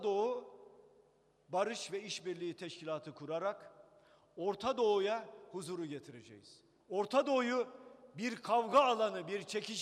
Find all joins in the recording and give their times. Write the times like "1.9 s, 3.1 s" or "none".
6.8 s